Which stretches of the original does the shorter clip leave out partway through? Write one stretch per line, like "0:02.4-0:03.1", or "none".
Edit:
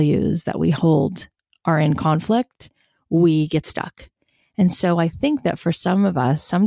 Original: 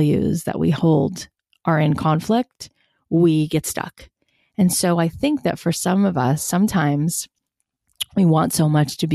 none